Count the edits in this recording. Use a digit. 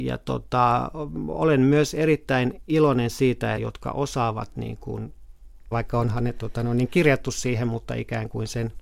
2